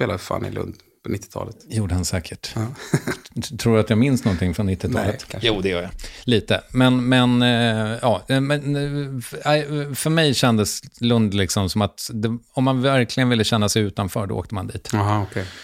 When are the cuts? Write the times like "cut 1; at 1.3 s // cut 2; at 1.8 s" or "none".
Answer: none